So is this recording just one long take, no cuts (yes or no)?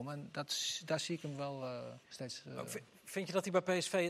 no